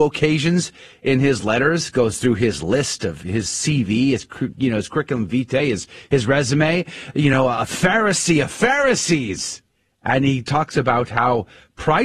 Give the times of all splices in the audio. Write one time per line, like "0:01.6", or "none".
none

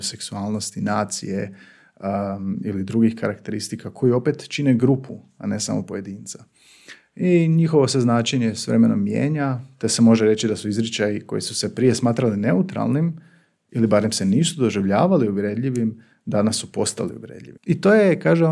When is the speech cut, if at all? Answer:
0:17.6

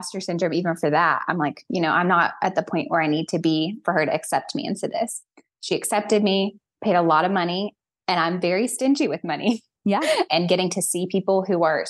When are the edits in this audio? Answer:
0:10.3

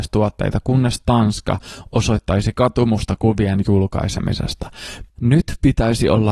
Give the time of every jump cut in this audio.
0:05.1

